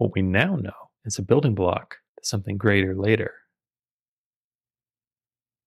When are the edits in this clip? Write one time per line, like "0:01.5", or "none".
0:01.0
0:02.1

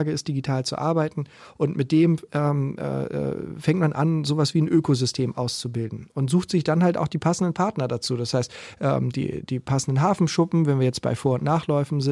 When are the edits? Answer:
none

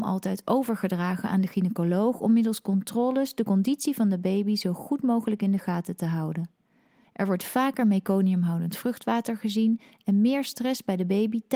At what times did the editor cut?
0:07.0

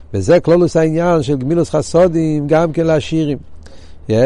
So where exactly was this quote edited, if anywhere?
none

